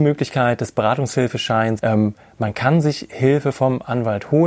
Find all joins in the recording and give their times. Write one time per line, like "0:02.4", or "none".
0:01.8